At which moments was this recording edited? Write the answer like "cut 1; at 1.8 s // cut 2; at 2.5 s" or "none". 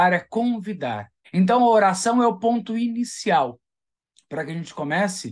cut 1; at 1.2 s